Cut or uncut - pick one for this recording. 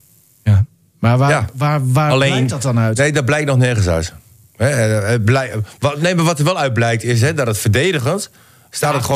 uncut